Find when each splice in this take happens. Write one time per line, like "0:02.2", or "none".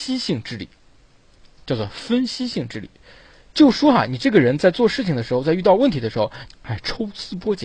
0:06.5